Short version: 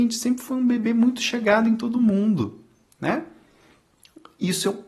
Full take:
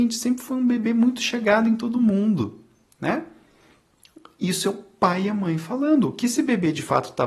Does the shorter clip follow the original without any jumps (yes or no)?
yes